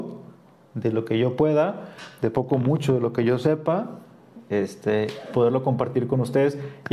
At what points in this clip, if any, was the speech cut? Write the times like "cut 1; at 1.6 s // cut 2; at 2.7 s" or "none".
none